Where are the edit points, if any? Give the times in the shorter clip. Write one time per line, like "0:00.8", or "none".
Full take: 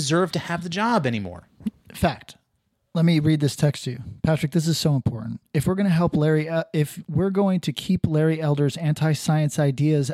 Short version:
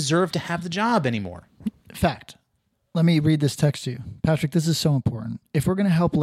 none